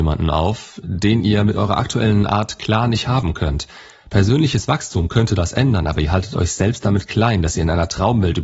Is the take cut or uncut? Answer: uncut